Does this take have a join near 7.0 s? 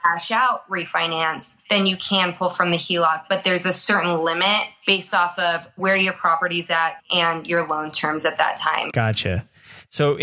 yes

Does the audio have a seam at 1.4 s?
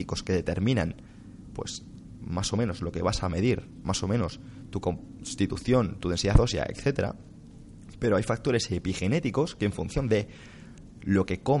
no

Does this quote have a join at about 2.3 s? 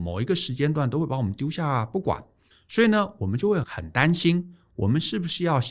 no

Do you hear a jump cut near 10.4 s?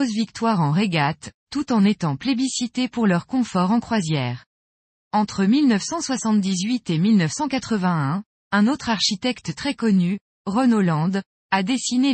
no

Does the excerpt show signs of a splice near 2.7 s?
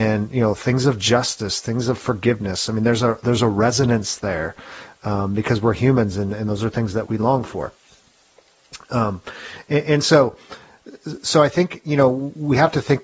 no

